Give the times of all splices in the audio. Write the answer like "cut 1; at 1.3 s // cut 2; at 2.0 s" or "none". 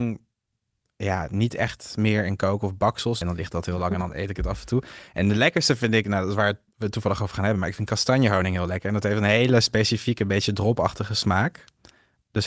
cut 1; at 3.2 s